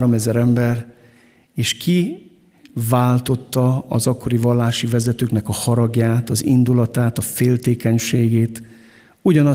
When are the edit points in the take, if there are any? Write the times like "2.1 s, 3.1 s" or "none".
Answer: none